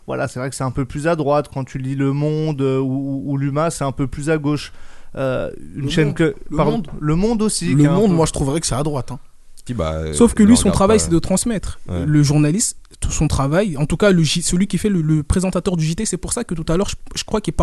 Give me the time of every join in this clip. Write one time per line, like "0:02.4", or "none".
0:09.7